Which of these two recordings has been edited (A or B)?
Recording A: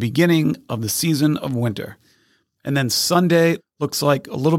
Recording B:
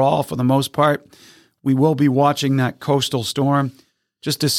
A